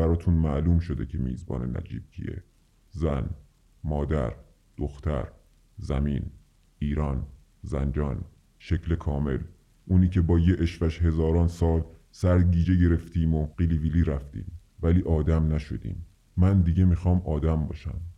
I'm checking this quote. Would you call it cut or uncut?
uncut